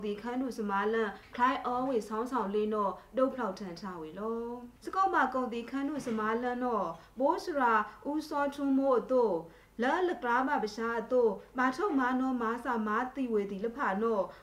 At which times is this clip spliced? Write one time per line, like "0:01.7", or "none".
0:04.8